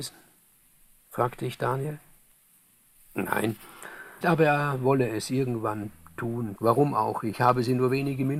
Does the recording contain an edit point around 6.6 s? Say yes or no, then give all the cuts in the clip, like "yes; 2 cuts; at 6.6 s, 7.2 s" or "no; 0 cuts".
yes; 2 cuts; at 4.2 s, 6.6 s